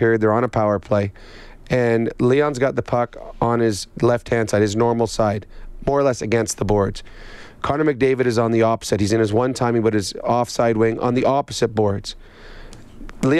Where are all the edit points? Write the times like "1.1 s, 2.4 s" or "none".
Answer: none